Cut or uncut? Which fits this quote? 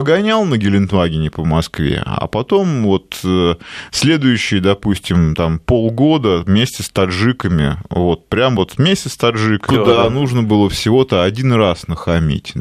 cut